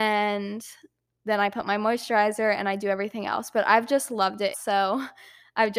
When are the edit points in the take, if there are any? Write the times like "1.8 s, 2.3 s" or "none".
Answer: 4.5 s